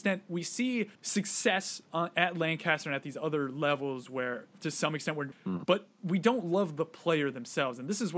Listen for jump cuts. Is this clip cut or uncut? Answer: cut